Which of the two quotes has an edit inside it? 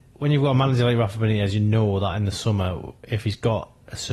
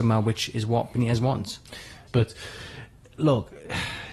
second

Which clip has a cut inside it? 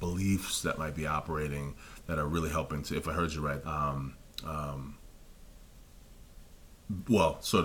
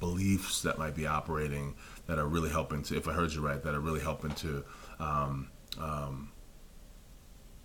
first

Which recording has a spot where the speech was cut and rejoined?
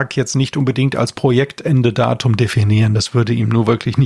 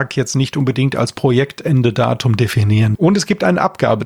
second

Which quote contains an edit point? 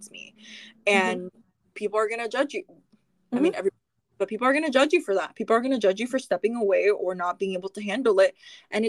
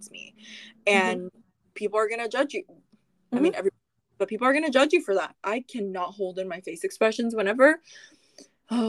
second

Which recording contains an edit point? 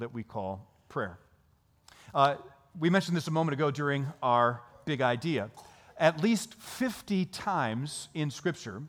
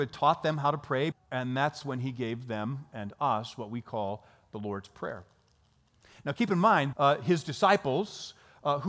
second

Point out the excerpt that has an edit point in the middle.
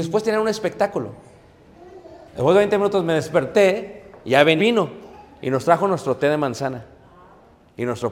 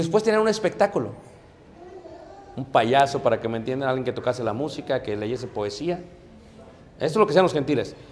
first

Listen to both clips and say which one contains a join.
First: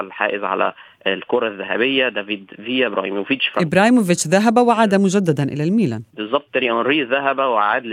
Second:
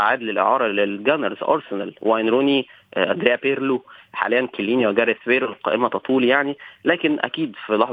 first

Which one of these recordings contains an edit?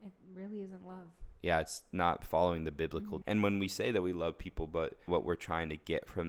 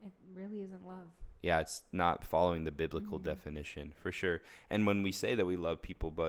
first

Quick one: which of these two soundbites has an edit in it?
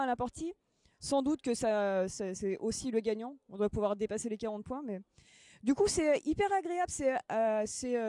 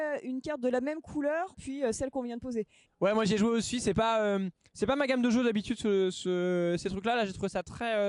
second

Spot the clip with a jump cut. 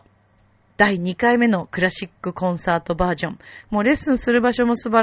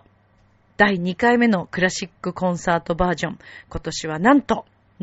first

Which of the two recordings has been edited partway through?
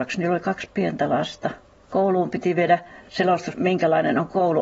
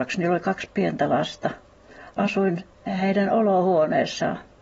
first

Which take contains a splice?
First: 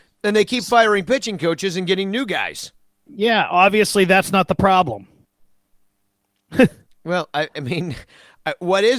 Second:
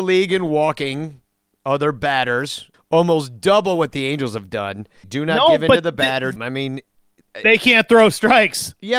second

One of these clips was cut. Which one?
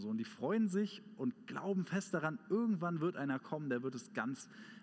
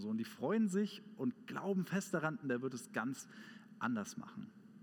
second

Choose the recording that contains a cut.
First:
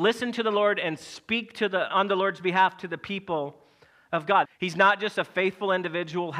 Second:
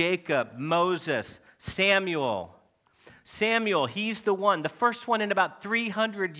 first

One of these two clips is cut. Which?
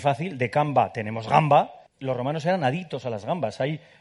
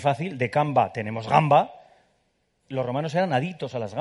first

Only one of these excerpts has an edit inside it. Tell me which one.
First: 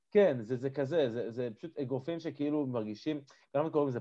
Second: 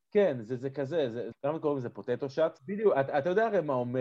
second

